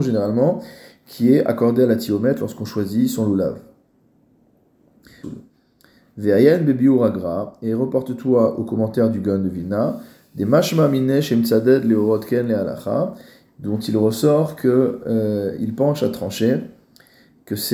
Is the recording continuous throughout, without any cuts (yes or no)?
no